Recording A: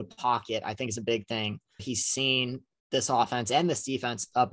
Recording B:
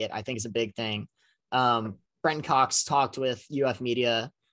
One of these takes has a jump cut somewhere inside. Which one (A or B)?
A